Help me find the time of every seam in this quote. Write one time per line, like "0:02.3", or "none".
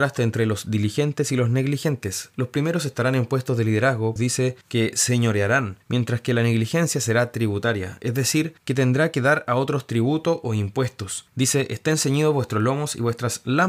0:04.2
0:11.3

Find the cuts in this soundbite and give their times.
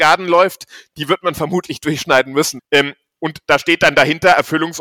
0:02.6

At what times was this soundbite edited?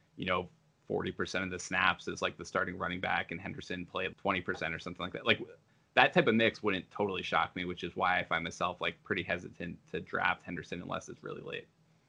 0:04.1

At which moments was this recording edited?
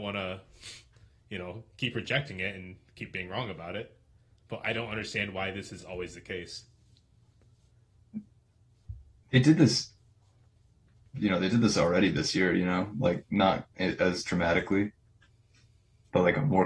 none

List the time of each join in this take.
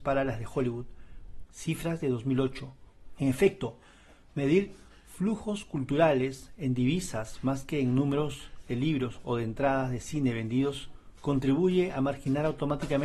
0:01.5
0:03.2

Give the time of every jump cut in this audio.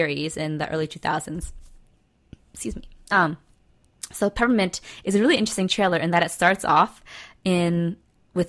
none

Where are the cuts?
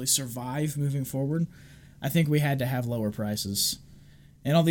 none

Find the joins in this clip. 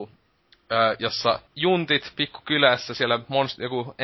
0:01.5

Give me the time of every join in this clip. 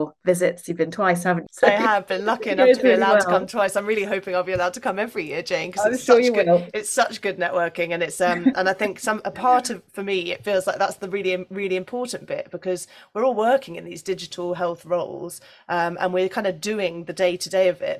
0:01.5

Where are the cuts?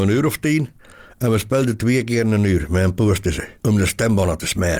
0:03.6

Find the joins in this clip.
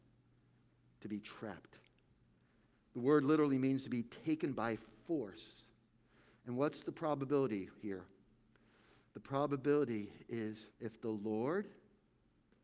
0:10.7

